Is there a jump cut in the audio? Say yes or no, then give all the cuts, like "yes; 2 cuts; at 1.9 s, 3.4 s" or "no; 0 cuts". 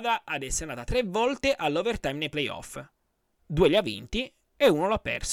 no; 0 cuts